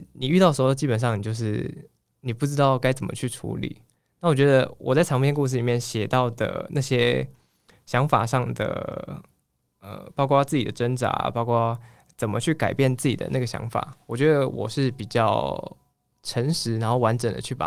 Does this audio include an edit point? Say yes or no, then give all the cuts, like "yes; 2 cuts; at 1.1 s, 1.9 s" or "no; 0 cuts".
no; 0 cuts